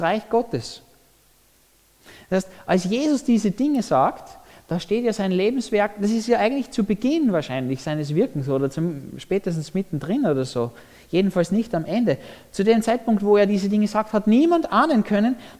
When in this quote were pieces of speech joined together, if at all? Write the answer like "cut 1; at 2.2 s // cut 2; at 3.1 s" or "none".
cut 1; at 7.8 s